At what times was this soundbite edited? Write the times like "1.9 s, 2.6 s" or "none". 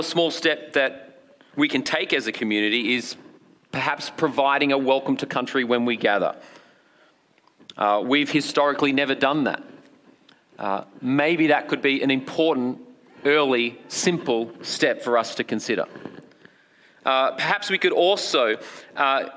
none